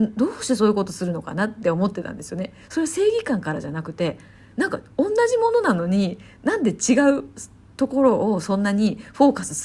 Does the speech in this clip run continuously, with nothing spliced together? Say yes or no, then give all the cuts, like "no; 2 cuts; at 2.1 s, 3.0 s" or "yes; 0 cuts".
yes; 0 cuts